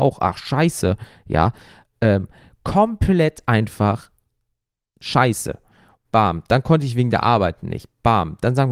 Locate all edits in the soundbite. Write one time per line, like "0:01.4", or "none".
0:06.0